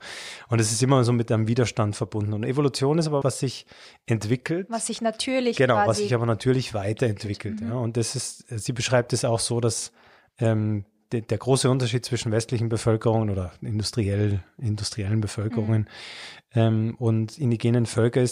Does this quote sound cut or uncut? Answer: cut